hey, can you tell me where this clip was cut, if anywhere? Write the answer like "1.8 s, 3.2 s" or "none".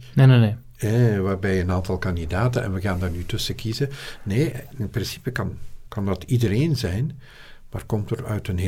5.9 s